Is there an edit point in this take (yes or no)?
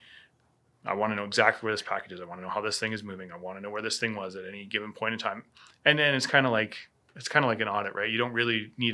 no